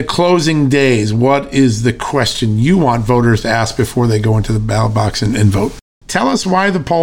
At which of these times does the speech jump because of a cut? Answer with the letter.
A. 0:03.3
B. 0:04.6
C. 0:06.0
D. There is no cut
C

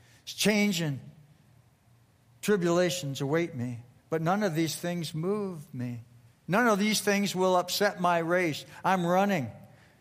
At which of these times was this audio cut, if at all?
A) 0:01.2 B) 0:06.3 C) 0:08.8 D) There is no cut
D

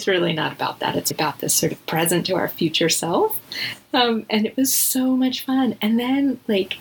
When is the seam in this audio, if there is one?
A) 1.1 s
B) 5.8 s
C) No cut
A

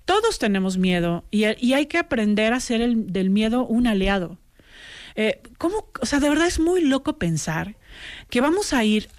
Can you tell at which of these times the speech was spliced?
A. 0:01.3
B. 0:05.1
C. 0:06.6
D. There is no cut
D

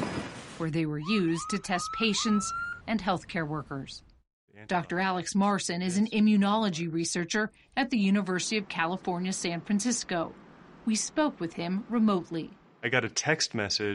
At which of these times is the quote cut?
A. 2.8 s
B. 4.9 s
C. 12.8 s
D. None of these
A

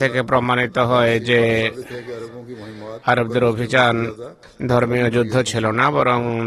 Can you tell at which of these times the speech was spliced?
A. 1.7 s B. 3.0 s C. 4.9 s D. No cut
B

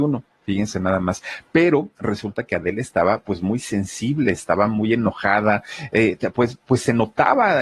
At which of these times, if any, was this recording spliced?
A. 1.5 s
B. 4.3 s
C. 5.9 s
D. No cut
D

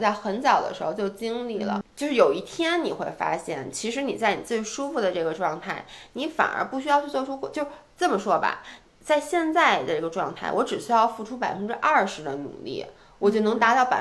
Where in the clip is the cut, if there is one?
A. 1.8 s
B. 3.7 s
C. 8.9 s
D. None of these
A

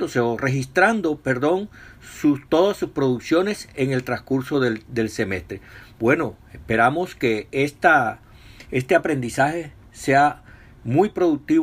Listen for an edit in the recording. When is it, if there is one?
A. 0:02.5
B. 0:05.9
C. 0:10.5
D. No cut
D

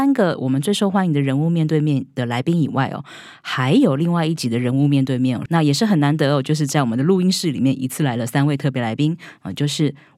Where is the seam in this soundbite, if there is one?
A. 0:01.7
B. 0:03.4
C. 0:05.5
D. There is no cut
C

